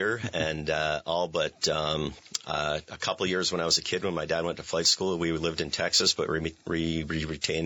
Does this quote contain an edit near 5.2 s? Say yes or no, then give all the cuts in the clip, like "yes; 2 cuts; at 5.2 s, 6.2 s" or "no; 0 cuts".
no; 0 cuts